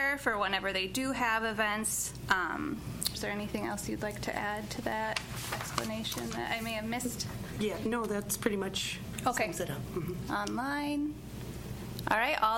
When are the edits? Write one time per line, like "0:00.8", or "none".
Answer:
0:03.1
0:10.3